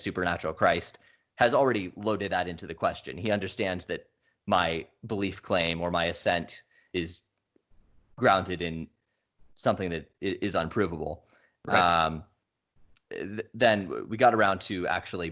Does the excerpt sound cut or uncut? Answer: cut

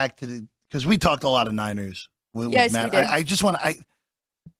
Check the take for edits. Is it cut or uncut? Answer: uncut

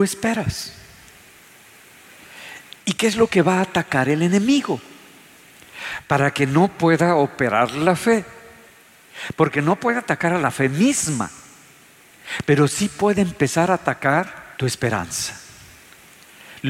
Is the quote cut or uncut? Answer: cut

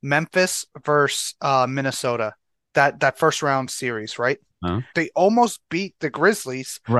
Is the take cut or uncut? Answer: cut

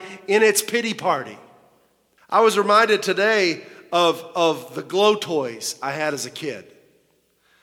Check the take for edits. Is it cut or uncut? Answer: cut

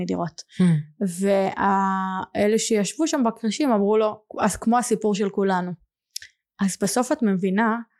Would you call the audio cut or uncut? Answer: cut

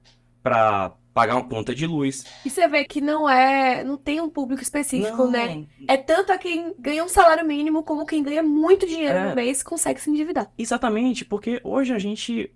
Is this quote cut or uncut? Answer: cut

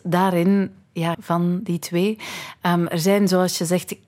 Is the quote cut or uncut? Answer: cut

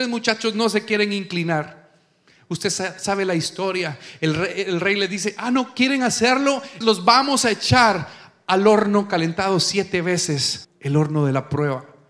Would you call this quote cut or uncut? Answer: cut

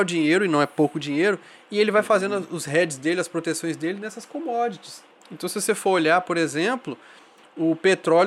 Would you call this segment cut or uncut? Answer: uncut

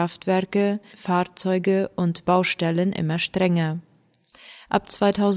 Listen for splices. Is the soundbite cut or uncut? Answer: cut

